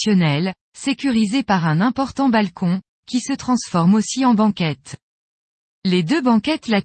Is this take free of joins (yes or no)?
no